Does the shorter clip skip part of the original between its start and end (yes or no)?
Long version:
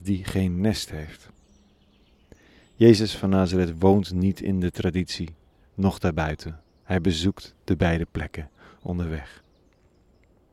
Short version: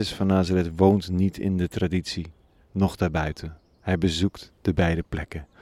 no